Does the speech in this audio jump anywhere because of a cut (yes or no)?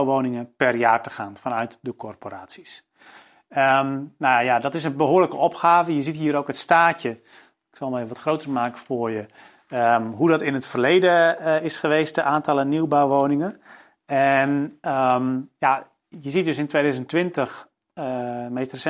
no